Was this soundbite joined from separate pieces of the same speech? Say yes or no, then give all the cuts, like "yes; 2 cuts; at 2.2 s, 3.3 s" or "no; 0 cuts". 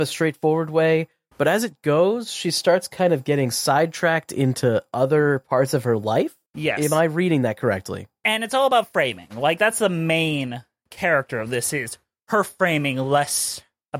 no; 0 cuts